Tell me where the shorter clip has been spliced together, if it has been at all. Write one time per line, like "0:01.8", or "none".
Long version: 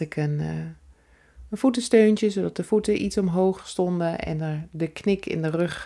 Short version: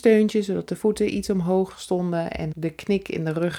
0:02.5